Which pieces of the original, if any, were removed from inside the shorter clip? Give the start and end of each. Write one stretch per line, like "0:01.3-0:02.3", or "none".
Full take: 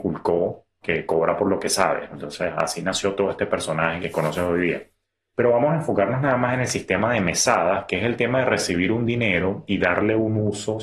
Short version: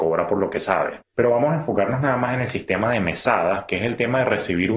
0:02.1-0:05.2